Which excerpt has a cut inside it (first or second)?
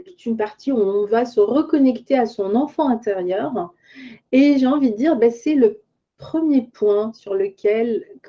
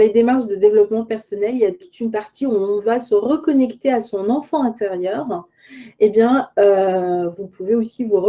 first